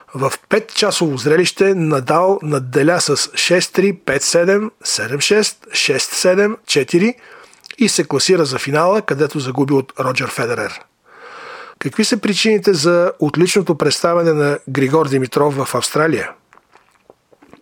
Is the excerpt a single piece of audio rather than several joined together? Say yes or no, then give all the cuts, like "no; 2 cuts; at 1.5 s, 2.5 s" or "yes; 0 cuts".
no; 2 cuts; at 6.6 s, 11.7 s